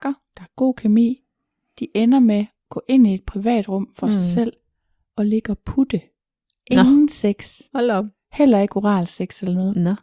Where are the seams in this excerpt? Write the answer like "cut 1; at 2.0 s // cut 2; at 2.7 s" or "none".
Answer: none